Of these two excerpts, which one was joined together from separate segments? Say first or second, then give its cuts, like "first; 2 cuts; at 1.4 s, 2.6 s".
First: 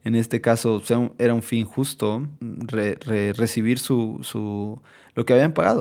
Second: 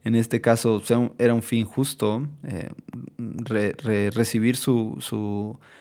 first; 1 cut; at 2.4 s